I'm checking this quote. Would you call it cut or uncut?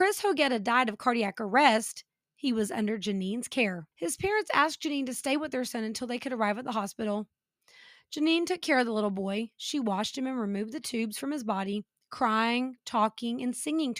cut